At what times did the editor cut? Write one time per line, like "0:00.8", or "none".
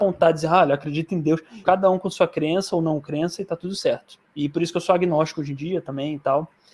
0:01.6

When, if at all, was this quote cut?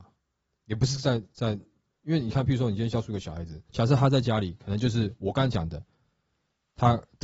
0:03.7

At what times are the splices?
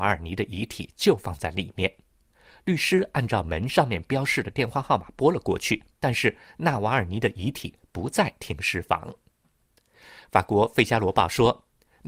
0:05.9

